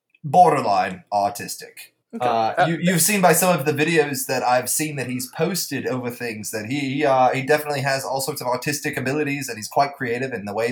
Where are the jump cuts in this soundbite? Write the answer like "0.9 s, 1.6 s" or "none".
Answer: 2.0 s